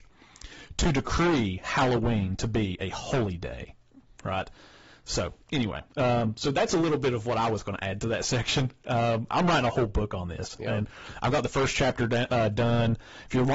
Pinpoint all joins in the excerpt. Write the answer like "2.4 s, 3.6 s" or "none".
9.3 s